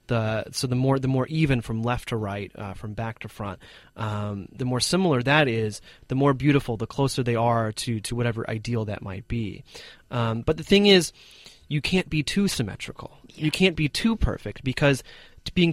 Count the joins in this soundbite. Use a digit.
0